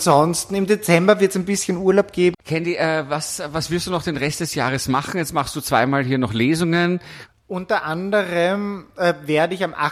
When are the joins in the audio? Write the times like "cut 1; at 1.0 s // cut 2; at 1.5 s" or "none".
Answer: cut 1; at 2.3 s // cut 2; at 7.3 s